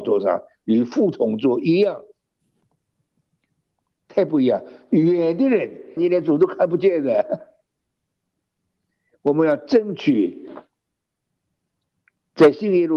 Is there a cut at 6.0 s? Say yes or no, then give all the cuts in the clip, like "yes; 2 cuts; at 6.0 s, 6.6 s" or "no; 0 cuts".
yes; 1 cut; at 6.0 s